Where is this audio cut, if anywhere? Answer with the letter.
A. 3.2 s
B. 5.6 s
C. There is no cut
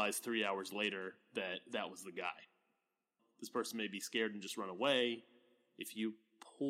A